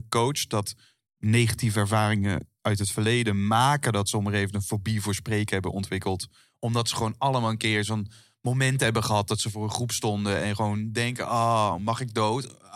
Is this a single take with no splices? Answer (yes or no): yes